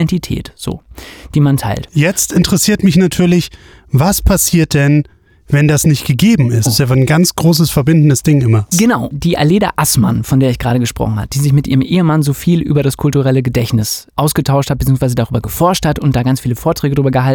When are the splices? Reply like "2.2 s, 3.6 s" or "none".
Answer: 6.7 s, 8.7 s, 14.1 s